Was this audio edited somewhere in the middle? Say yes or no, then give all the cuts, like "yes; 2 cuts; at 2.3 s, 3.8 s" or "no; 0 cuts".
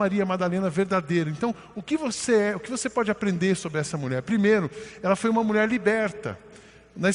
no; 0 cuts